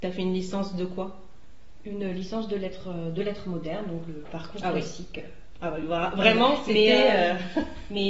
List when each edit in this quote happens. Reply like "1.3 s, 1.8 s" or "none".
none